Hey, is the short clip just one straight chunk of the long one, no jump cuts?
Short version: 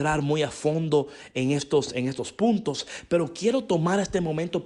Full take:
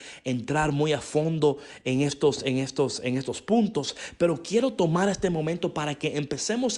no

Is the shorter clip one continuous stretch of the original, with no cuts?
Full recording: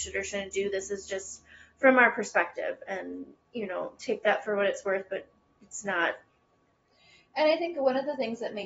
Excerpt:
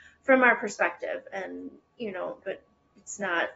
no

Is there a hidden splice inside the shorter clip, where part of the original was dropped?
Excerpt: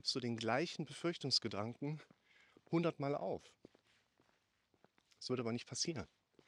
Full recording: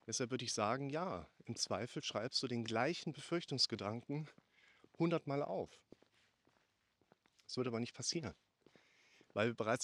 no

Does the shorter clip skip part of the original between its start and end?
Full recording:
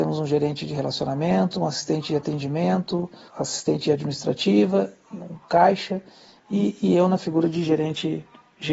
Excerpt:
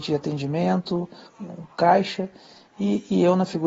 yes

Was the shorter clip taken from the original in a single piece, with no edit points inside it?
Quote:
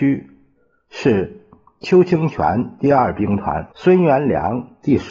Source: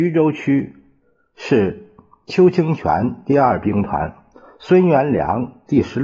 no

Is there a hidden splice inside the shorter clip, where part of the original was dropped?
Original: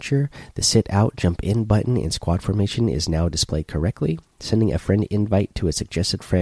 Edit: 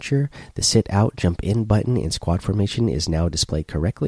no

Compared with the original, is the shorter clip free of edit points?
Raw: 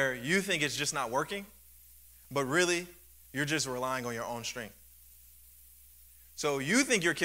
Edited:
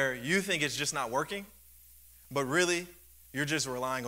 yes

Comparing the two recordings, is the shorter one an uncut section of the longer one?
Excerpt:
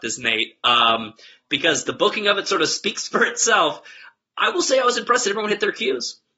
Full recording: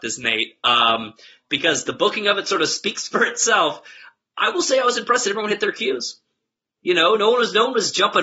yes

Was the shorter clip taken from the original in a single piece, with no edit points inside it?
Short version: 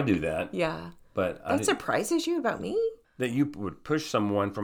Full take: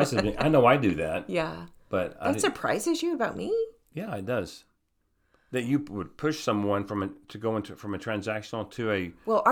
no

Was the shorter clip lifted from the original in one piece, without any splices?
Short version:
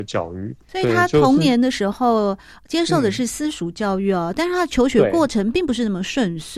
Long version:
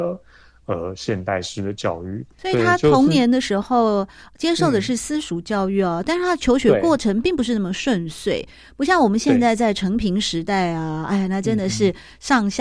yes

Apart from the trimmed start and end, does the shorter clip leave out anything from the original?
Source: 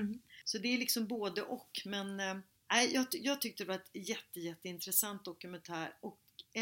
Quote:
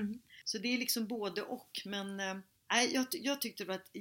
no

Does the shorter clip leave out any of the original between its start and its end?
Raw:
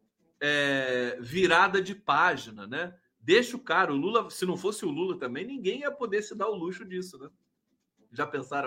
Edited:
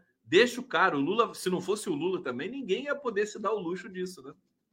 no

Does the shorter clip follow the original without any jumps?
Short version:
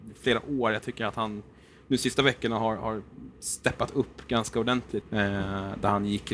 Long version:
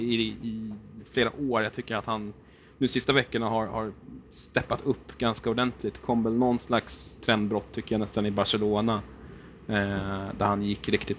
no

